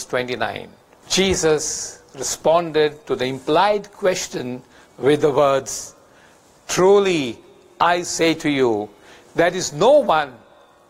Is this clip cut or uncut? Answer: cut